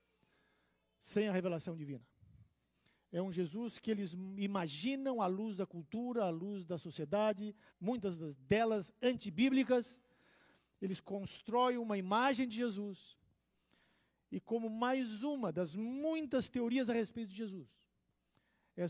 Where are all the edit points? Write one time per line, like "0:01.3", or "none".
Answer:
0:07.7